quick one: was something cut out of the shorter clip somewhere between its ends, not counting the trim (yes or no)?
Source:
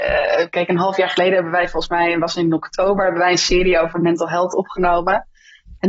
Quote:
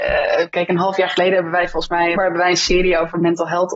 yes